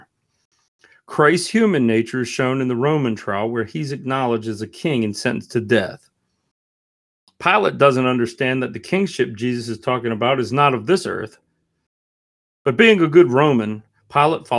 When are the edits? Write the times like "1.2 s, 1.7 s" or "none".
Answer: none